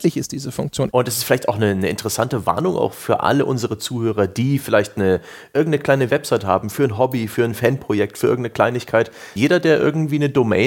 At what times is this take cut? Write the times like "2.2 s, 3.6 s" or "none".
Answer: 0.9 s, 9.4 s